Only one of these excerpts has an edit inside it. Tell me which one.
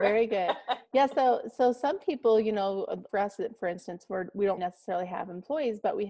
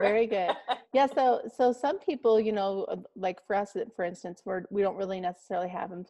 first; 2 cuts; at 3.1 s, 4.6 s

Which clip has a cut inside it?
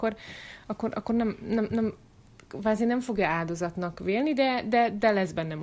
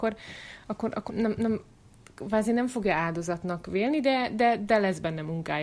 second; 1 cut; at 1.1 s

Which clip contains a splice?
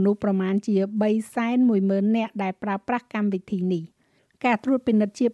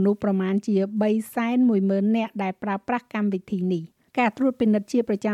second; 1 cut; at 4.1 s

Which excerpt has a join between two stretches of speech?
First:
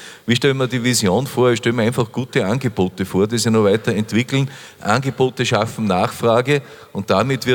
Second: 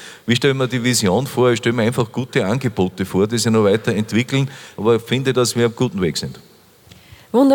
second; 1 cut; at 4.7 s

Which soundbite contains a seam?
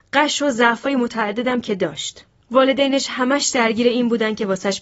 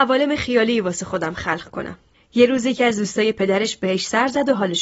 second; 1 cut; at 2.1 s

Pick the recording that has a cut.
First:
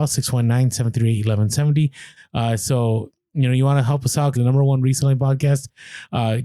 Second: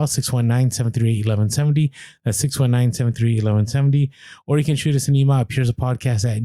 first; 2 cuts; at 2.2 s, 4.4 s

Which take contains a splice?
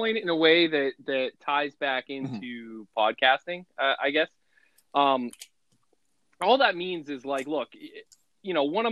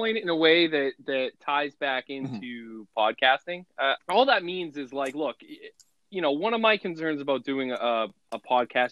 second; 1 cut; at 4.0 s

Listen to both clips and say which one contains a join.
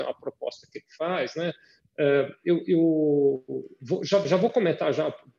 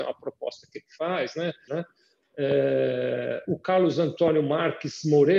second; 1 cut; at 1.7 s

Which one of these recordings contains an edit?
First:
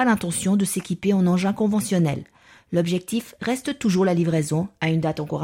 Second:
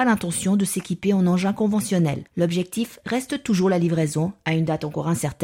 second; 1 cut; at 2.3 s

